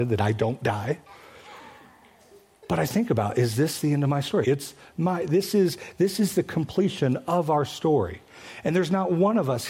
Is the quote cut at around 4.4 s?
yes; 1 cut; at 4.4 s

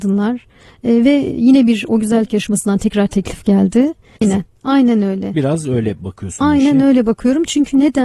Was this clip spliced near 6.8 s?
no; 2 cuts; at 1.3 s, 4.2 s

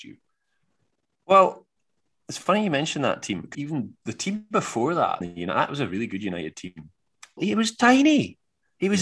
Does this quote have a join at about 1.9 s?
no; 3 cuts; at 3.5 s, 5.2 s, 7.4 s

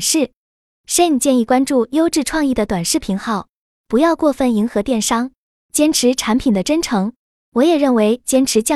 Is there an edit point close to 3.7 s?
no; 0 cuts

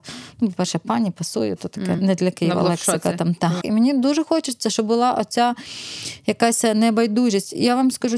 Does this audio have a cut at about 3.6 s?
yes; 2 cuts; at 2.0 s, 3.6 s

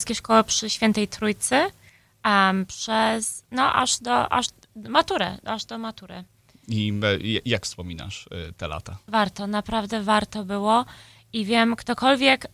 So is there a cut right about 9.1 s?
yes; 1 cut; at 9.1 s

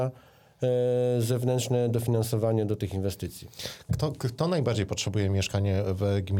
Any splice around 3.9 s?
yes; 1 cut; at 3.9 s

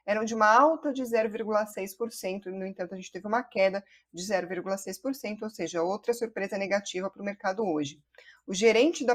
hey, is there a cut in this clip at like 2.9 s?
no; 0 cuts

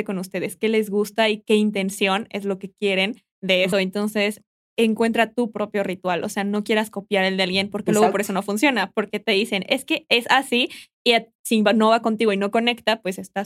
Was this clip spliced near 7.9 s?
no; 1 cut; at 3.7 s

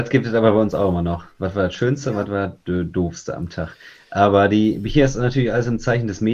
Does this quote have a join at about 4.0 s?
no; 0 cuts

